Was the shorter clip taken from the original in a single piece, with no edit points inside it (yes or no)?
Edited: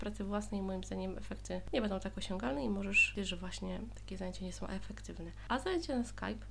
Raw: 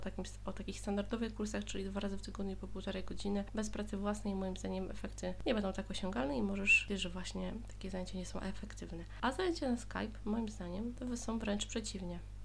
yes